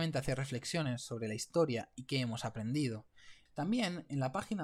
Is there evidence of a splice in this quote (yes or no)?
yes